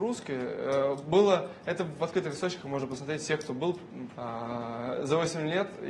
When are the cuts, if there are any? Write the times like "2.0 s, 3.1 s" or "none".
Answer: 4.1 s